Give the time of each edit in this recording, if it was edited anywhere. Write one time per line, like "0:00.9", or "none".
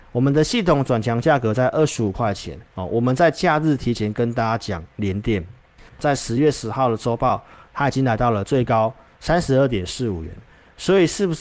0:05.9